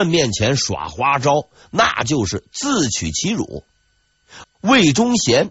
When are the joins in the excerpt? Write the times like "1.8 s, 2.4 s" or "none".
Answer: 4.4 s